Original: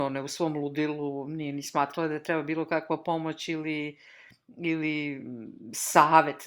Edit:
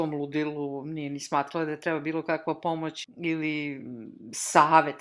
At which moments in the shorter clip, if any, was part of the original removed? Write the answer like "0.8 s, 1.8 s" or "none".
3.0 s